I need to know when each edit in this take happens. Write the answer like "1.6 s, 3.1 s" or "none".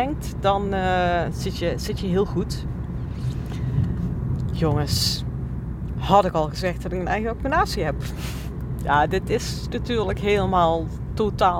none

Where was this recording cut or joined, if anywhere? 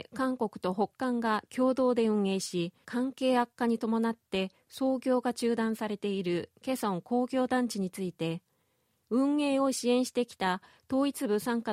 2.8 s

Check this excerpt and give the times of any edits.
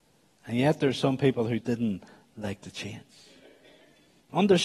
1.6 s

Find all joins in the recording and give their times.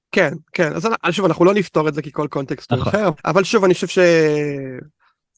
3.2 s

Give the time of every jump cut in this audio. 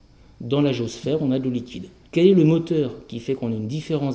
2.0 s

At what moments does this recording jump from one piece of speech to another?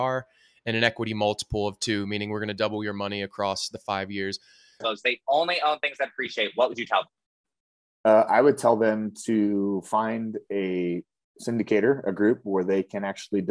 4.8 s

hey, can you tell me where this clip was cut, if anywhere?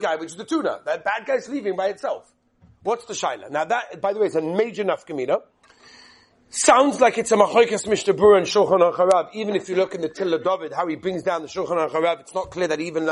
1.5 s

